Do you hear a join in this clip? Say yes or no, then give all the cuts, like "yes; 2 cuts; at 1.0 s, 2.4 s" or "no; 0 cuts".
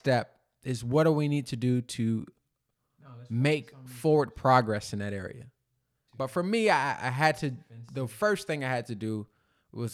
yes; 1 cut; at 6.1 s